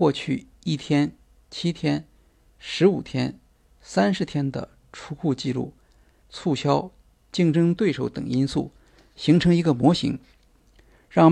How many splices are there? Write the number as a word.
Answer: one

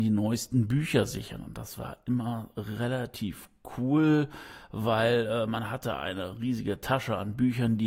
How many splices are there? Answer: zero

